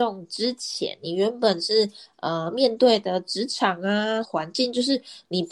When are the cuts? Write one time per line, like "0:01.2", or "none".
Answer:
0:04.2

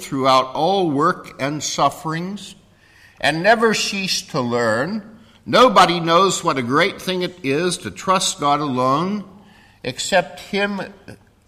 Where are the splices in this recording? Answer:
none

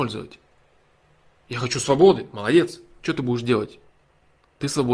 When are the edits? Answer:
none

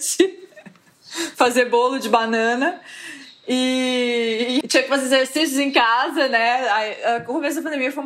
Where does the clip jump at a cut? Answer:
0:04.6

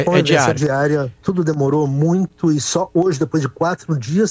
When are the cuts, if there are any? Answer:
0:01.2

